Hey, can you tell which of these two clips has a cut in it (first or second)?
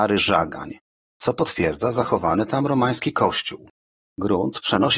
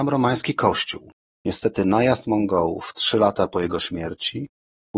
second